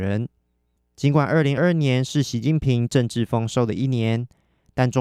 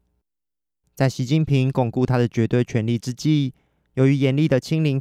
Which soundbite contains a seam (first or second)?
first